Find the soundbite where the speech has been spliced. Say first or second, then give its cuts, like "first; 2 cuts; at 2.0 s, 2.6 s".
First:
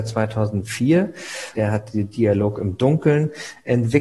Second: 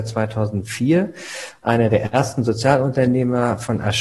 first; 1 cut; at 1.5 s